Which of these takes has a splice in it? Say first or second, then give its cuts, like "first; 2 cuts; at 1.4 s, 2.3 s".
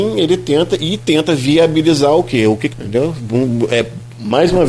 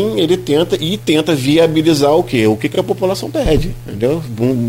first; 1 cut; at 2.7 s